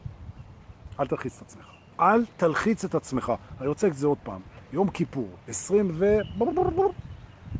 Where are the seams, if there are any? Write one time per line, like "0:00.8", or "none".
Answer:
0:01.9